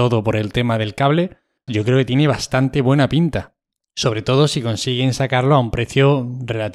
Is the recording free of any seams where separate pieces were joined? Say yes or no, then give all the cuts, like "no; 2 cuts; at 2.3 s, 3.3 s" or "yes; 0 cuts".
no; 1 cut; at 1.7 s